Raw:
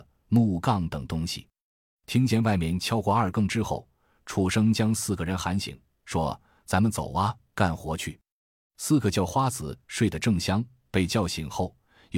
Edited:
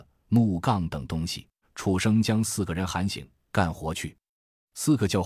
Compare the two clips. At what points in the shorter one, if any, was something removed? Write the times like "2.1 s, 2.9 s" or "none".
1.6 s, 3.5 s